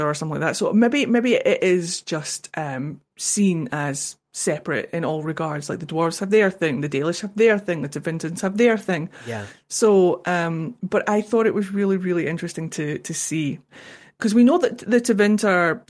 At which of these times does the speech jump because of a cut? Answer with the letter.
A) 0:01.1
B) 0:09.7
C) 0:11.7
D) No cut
D